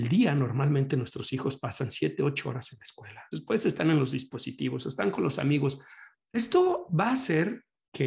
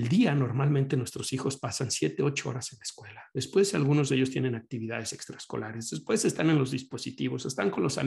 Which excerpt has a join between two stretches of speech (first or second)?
first